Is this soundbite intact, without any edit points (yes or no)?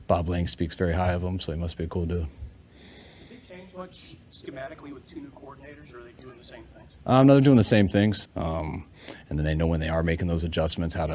no